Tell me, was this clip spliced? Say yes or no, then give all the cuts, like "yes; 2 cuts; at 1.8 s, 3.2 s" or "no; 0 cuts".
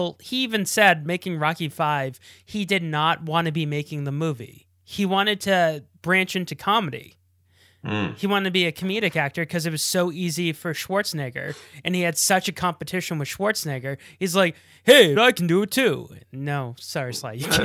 yes; 1 cut; at 15.2 s